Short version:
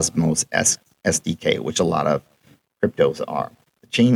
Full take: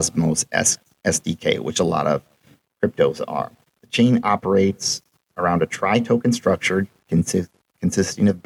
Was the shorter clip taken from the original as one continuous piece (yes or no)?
yes